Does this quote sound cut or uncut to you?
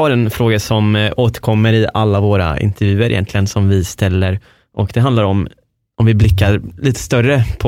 uncut